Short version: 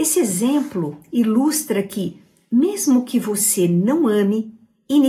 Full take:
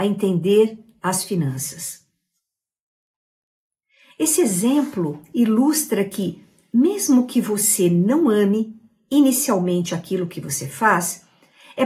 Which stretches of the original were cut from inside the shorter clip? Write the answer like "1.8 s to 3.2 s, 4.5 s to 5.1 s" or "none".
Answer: none

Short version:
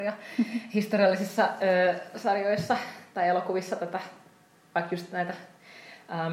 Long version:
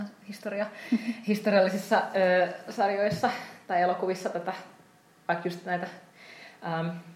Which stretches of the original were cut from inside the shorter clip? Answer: none

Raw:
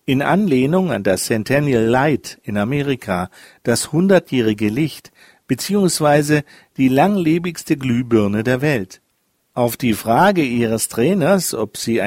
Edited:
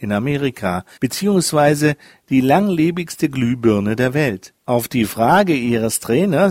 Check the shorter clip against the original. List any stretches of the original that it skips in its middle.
3.4 s to 5.4 s, 9.1 s to 9.5 s

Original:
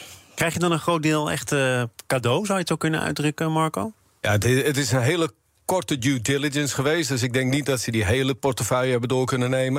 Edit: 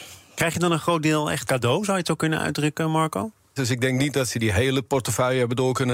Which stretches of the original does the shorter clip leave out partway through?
1.5 s to 2.1 s, 4.2 s to 7.1 s

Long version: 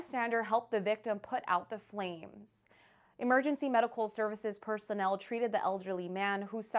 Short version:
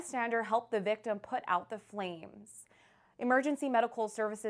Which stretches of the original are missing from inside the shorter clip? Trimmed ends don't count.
none

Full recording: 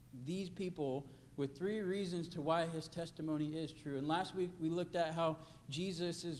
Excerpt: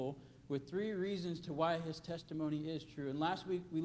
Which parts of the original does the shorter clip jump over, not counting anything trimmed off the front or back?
none

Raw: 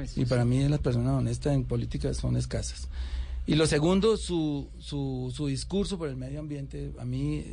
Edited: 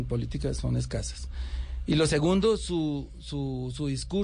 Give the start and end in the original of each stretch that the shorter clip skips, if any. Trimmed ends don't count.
none

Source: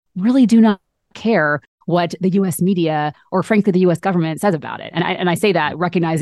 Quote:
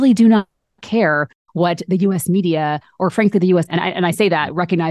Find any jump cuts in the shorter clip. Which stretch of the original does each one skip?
4.0 s to 4.9 s

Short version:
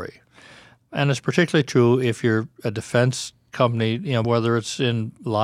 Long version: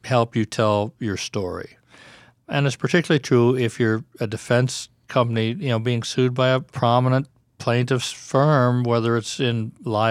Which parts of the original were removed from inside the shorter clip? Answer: 5.8 s to 8.8 s

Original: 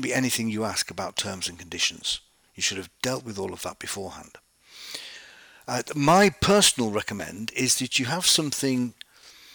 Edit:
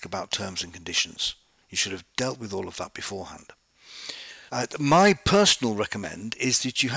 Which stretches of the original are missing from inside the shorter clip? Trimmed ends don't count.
5.3 s to 5.6 s

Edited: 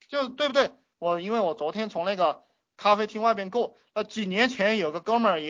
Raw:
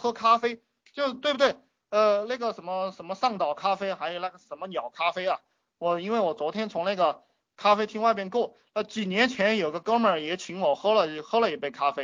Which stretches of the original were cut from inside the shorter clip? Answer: 1.8 s to 5.7 s

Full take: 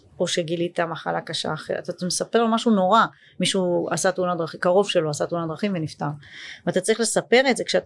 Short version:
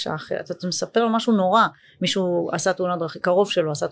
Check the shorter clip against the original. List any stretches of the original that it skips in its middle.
none

